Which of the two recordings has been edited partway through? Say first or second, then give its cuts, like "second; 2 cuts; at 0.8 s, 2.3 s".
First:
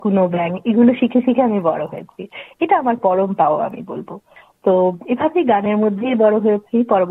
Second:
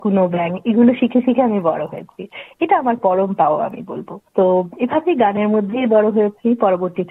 second; 1 cut; at 4.3 s